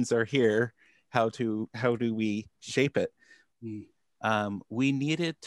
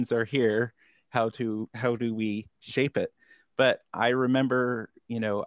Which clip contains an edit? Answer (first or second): first